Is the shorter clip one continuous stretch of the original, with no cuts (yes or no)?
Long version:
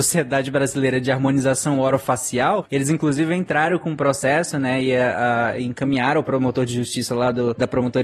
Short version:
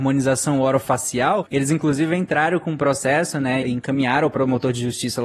no